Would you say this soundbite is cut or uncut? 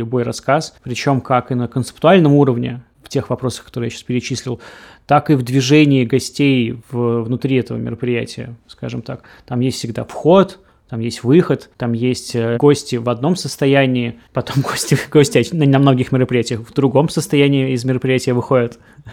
cut